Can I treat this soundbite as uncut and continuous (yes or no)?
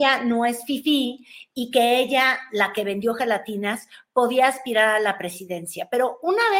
yes